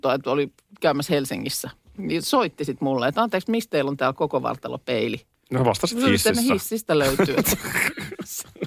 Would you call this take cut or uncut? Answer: uncut